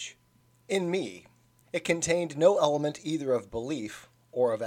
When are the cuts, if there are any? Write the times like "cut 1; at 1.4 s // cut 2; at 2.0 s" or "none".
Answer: cut 1; at 1.6 s

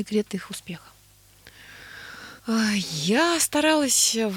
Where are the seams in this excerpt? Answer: cut 1; at 2.4 s

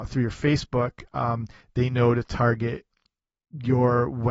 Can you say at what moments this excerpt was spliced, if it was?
none

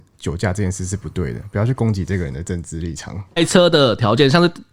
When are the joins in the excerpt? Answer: cut 1; at 3.4 s

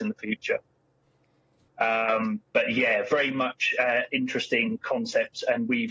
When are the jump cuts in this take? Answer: cut 1; at 1.7 s

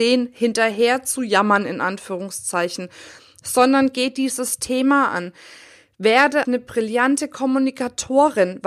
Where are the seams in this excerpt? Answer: cut 1; at 6.4 s

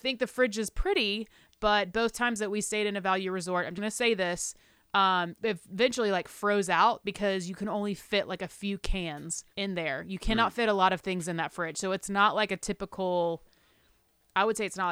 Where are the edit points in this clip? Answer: cut 1; at 3.8 s // cut 2; at 5.4 s // cut 3; at 9.5 s

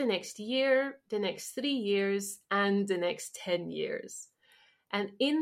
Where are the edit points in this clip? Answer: none

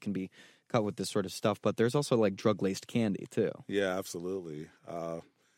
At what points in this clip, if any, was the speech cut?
none

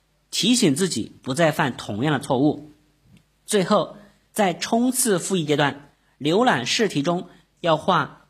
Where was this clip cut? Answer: none

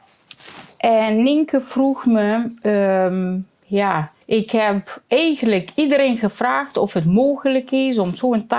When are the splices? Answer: cut 1; at 4.2 s

